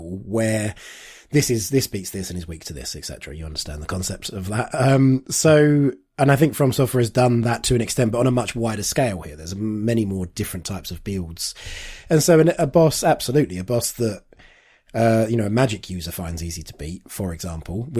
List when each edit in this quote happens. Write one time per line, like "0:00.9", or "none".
none